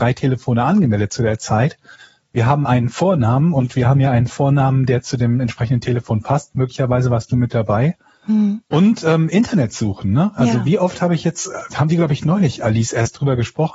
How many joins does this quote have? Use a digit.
0